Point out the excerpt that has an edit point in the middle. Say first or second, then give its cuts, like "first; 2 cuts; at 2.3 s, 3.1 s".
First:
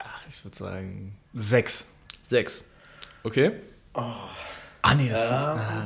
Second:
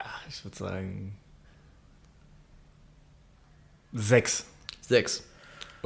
first; 1 cut; at 1.3 s